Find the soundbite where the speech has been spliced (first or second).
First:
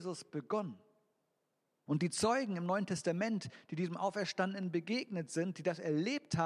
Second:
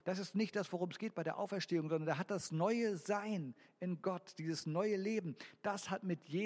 first